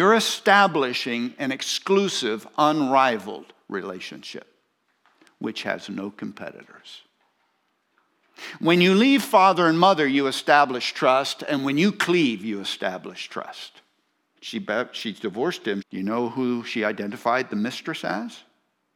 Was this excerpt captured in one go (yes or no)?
no